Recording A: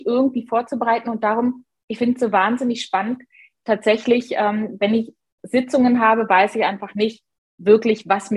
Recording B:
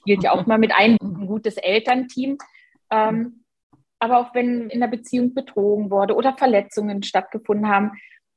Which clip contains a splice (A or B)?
B